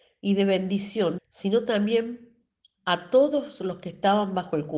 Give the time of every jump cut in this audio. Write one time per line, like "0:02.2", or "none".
0:01.2